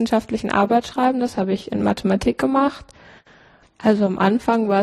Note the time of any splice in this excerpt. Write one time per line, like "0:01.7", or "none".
0:03.6